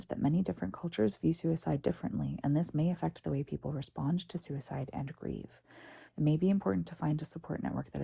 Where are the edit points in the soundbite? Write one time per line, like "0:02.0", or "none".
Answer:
0:06.1